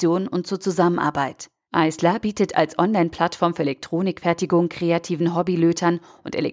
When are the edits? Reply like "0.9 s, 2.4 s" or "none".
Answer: 1.7 s